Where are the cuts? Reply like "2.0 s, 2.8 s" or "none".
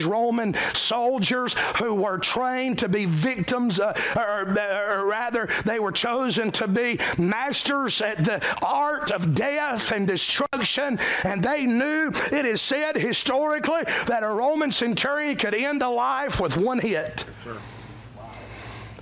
none